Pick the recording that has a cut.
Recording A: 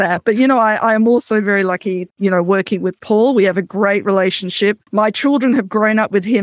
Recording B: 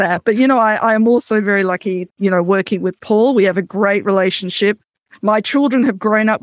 A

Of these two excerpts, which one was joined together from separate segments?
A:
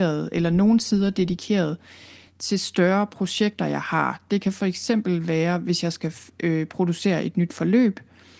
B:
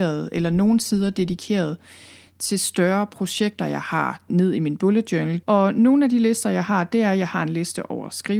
B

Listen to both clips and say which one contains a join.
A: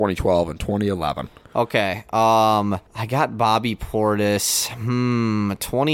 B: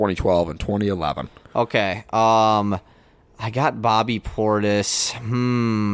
A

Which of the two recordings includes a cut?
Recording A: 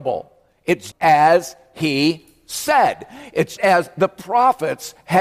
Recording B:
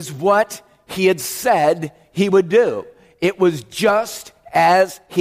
A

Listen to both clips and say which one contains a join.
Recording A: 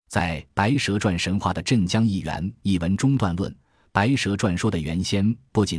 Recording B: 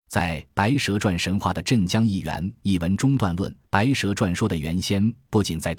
B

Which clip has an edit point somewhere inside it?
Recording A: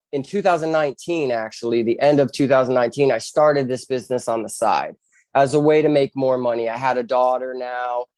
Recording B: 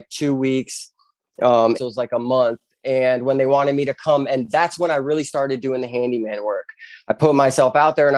B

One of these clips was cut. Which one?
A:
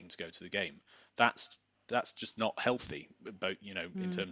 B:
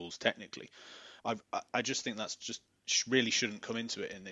B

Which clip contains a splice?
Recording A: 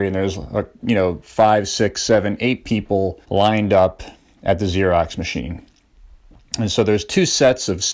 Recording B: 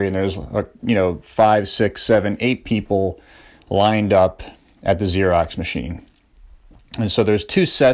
A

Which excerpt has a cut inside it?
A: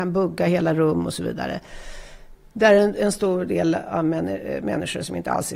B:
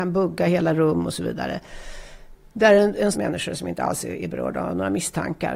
B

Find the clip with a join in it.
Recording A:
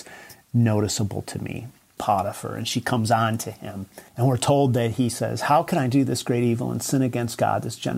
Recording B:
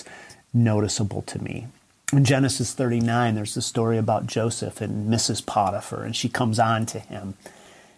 A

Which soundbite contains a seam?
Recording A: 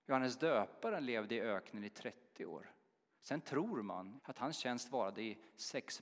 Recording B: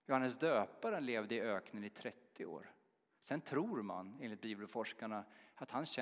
A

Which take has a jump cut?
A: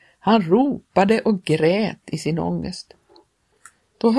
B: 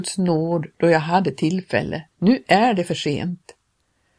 B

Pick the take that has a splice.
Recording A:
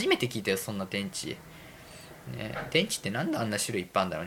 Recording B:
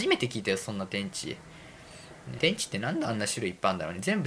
B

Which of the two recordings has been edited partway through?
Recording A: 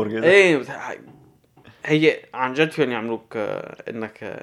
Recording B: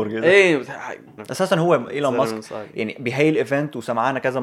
B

